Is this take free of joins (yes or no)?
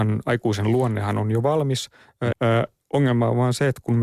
no